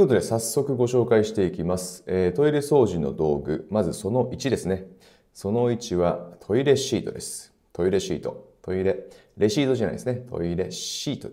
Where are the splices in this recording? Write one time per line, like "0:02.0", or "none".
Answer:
none